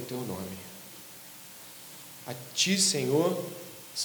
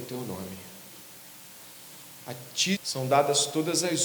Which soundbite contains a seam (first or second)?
second